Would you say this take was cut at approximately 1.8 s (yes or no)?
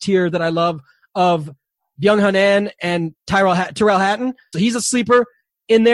no